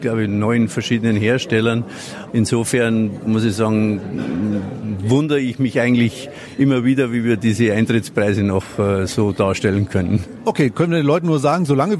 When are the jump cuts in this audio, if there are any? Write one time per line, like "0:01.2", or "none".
0:02.3